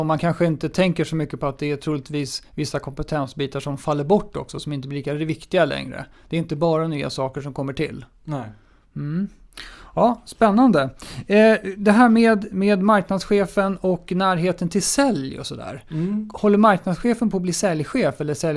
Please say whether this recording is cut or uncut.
uncut